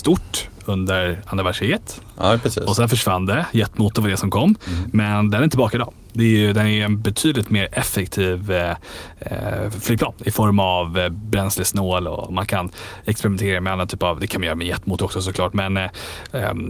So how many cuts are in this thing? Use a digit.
0